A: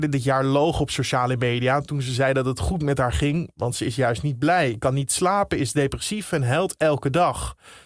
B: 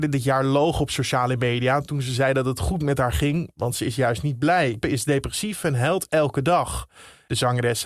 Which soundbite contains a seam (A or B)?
B